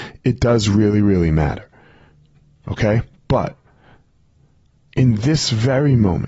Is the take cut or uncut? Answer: uncut